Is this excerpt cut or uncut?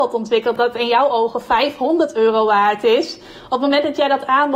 uncut